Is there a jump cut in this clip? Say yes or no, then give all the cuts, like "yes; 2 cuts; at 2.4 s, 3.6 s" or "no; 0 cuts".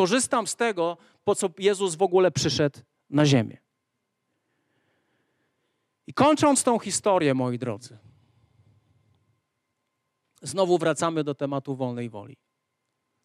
no; 0 cuts